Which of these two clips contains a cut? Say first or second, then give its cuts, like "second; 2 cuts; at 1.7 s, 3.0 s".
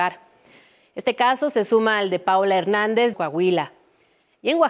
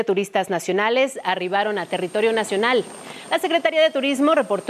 first; 1 cut; at 3.1 s